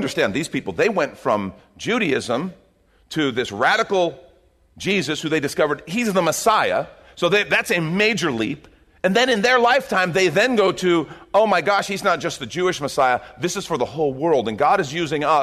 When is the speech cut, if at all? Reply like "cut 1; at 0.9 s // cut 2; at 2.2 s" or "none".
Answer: none